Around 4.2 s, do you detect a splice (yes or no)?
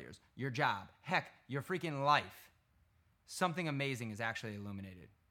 no